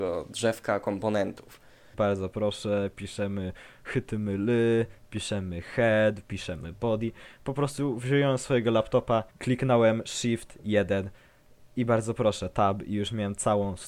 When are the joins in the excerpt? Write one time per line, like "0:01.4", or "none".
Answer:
0:01.9
0:09.3